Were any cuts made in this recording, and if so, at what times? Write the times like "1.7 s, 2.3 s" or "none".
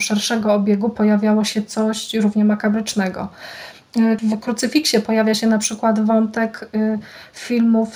4.2 s